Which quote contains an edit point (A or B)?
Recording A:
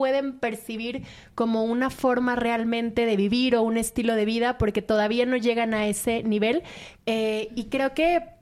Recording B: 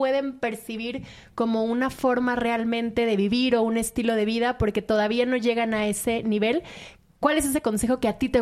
A